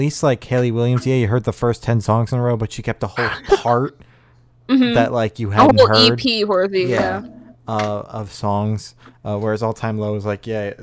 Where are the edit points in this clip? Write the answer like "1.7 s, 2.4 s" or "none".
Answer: none